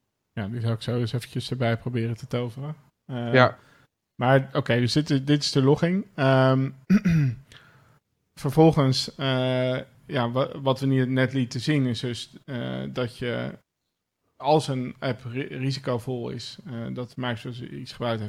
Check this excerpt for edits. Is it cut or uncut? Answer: uncut